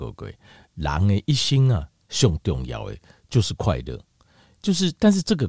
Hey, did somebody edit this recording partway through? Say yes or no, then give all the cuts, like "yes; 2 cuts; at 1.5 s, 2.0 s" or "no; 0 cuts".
no; 0 cuts